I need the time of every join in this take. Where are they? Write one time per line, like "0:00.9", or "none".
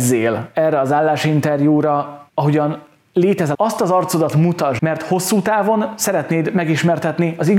0:02.3
0:03.5
0:04.8